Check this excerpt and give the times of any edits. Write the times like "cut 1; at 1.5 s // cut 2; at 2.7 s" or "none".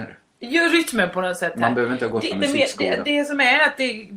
cut 1; at 2.3 s